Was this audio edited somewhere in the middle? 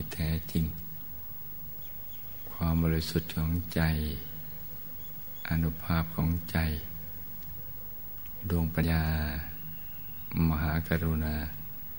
yes; 1 cut; at 8.8 s

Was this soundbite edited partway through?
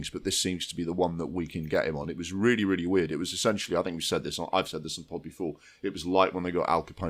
no; 0 cuts

